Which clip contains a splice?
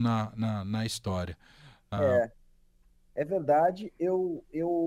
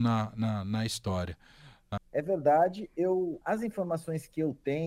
second; 2 cuts; at 2.0 s, 3.4 s

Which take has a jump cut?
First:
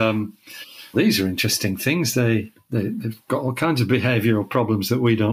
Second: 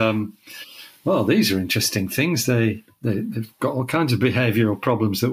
first; 1 cut; at 0.9 s

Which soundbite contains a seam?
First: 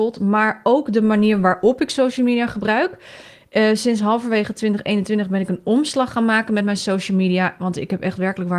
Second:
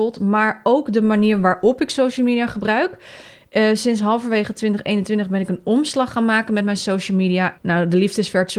second; 1 cut; at 7.6 s

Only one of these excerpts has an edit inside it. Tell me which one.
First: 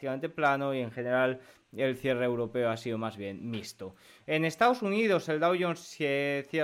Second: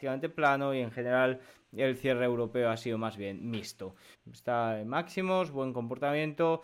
second; 1 cut; at 4.1 s

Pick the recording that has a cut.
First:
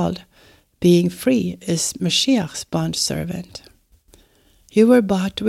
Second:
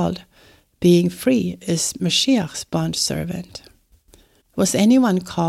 second; 1 cut; at 4.4 s

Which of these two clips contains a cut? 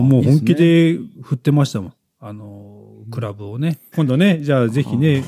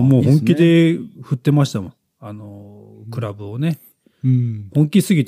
first; 1 cut; at 3.9 s

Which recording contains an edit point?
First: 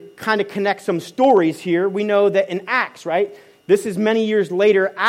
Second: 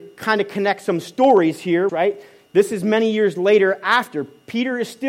second; 1 cut; at 1.9 s

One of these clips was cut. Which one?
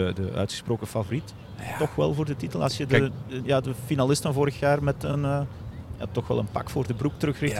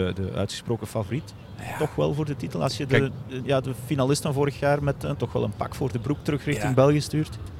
second; 1 cut; at 5.1 s

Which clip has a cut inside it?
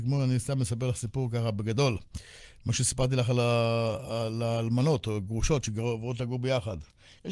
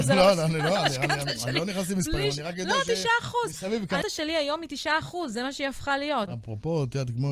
second; 2 cuts; at 4.0 s, 6.3 s

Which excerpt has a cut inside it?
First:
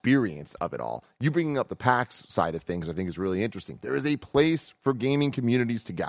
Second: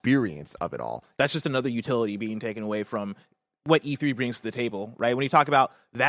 second; 1 cut; at 1.1 s

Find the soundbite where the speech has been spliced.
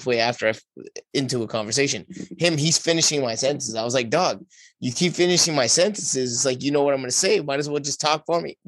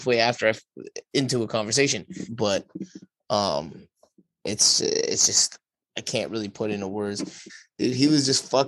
second; 2 cuts; at 2.3 s, 7.5 s

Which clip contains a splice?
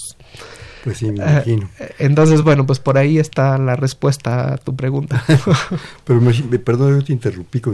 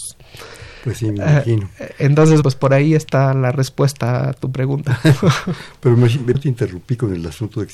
second; 2 cuts; at 2.4 s, 6.3 s

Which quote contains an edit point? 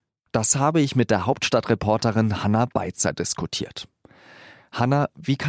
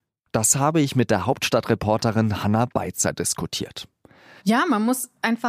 second; 1 cut; at 4.4 s

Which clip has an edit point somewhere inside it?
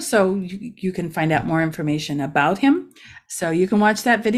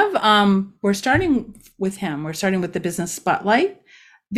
first; 1 cut; at 3.3 s

